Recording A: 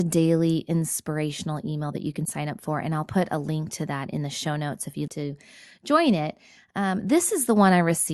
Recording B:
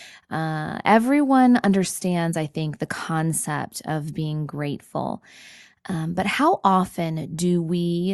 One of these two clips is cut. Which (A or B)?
A